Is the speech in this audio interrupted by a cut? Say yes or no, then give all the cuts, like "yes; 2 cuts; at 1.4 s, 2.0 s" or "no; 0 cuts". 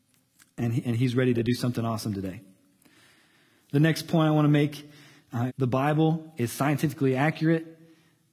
yes; 1 cut; at 5.5 s